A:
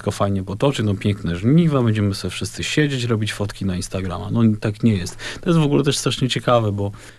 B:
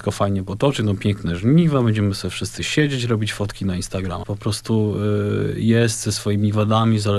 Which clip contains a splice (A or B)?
B